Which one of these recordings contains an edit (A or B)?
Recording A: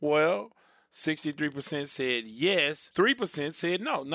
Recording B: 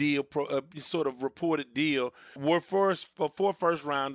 B